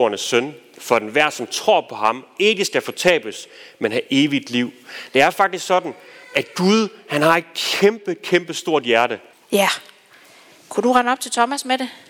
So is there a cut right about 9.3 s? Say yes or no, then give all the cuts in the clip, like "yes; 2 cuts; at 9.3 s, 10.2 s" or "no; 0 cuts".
yes; 1 cut; at 9.3 s